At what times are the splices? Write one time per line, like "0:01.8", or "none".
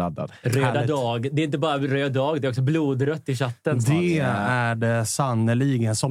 none